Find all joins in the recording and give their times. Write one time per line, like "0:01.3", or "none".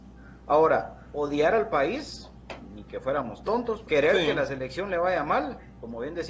0:03.8